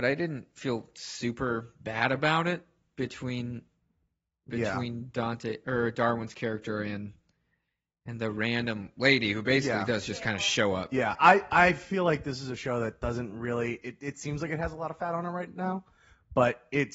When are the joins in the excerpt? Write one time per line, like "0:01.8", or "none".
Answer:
none